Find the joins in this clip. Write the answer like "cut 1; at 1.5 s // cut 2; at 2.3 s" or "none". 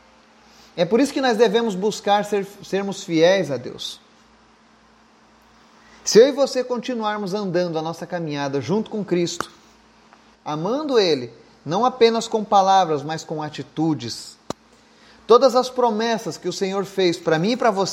cut 1; at 10.3 s